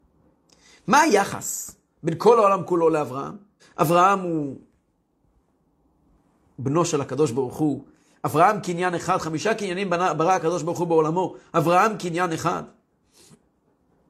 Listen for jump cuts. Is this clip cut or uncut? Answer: cut